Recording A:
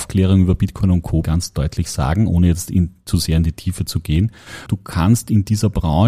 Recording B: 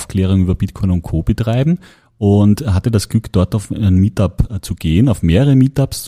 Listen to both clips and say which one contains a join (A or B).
A